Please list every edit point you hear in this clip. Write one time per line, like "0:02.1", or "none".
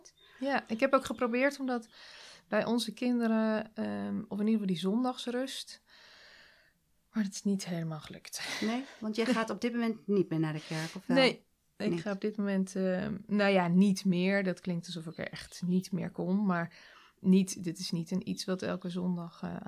none